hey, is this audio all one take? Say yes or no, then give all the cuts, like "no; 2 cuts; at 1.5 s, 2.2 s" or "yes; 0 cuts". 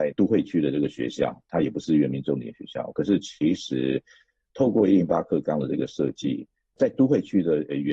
yes; 0 cuts